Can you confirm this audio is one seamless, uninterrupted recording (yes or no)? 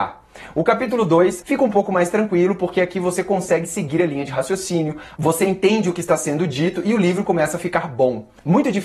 no